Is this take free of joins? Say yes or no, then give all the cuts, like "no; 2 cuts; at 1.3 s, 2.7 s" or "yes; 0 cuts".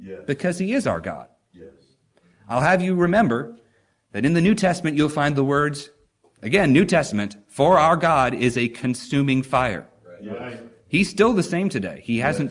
yes; 0 cuts